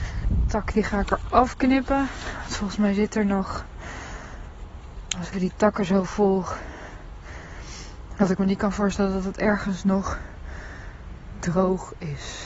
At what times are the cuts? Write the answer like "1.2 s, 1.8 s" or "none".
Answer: 5.3 s, 8.2 s